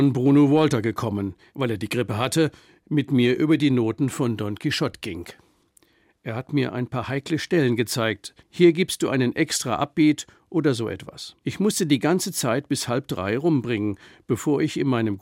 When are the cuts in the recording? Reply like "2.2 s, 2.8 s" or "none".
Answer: 1.5 s, 8.4 s, 11.4 s